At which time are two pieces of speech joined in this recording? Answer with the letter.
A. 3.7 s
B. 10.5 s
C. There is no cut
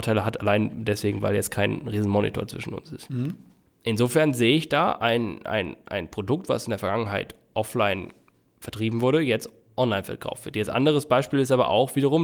A